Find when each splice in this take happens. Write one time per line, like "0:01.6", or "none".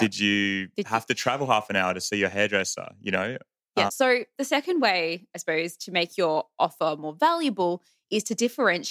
0:03.9